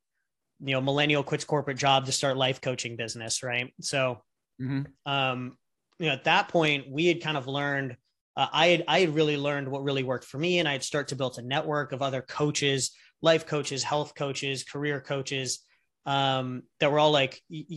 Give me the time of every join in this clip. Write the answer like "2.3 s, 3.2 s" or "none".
none